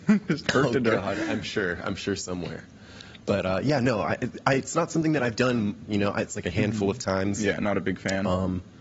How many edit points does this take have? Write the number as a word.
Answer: zero